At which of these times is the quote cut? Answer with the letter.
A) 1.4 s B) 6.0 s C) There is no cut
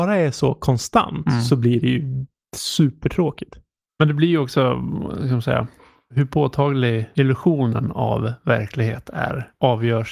C